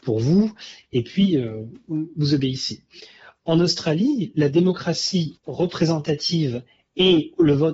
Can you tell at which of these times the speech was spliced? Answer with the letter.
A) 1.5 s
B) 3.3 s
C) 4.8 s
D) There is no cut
D